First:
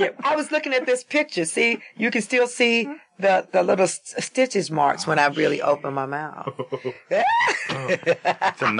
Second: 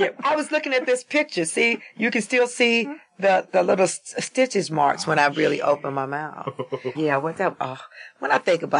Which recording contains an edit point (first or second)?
second